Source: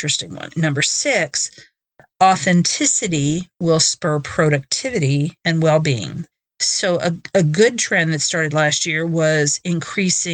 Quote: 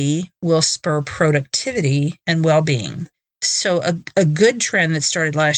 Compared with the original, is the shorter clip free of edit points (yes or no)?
yes